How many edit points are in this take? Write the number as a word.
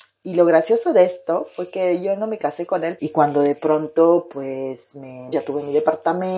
two